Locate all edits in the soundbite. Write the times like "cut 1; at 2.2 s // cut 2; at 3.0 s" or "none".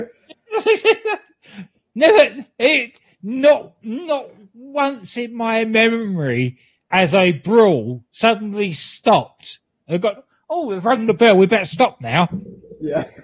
none